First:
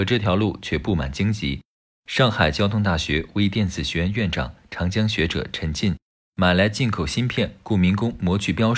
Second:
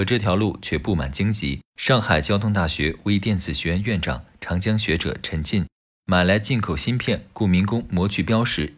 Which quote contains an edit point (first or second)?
second